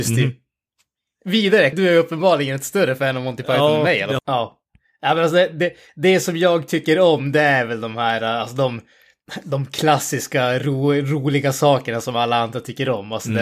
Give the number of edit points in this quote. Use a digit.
2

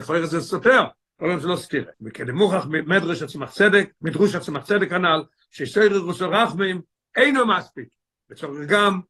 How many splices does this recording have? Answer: 1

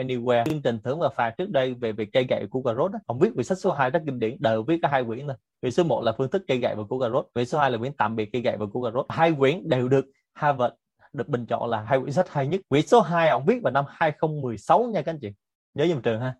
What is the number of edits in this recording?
1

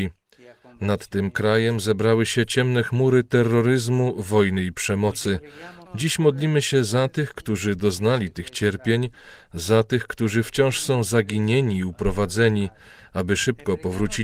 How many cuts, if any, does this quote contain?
1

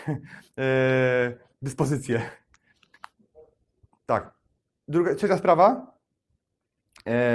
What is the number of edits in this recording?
0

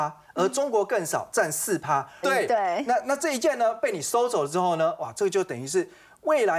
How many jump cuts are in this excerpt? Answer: 1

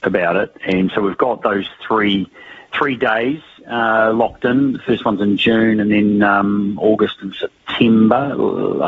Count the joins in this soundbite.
0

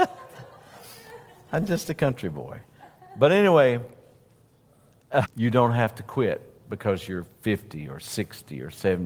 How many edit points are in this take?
1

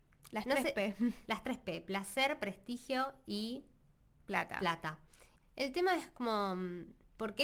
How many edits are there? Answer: 0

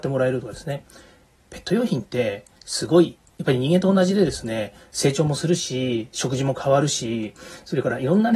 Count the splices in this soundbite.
0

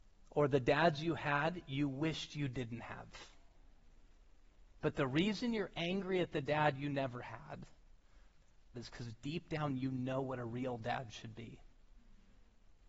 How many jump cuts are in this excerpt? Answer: 2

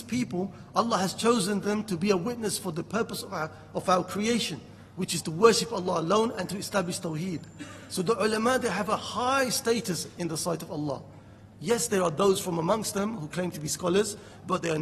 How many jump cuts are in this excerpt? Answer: 1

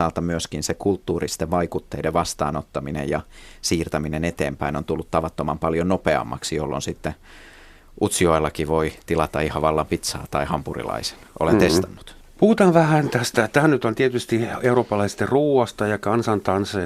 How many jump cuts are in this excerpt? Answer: 1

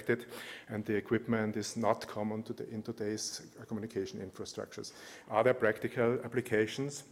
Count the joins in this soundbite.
1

